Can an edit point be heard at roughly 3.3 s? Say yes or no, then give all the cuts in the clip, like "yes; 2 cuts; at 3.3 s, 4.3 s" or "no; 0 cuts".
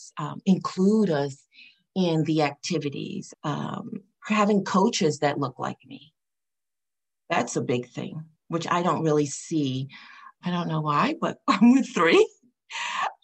yes; 2 cuts; at 3.3 s, 10.4 s